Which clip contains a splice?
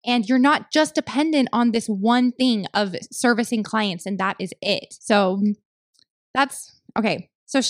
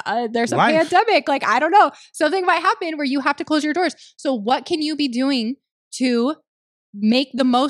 first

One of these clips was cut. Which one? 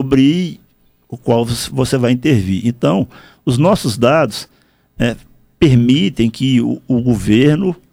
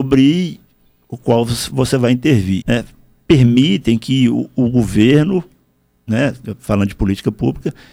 second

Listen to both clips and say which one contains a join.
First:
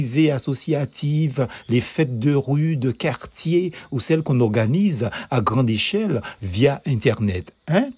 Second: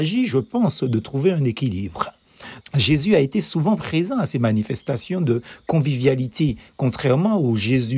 second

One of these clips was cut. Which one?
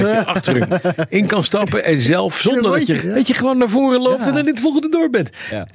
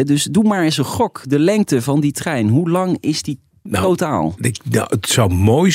first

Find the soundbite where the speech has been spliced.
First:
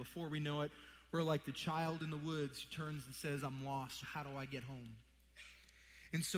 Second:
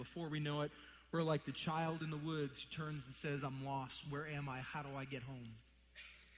first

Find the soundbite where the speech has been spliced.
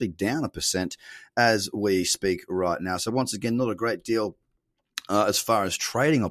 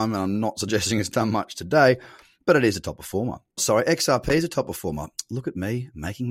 second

